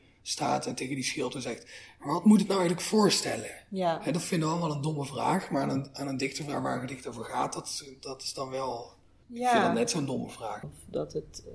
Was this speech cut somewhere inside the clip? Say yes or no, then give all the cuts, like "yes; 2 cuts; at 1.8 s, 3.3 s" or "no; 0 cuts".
yes; 1 cut; at 10.6 s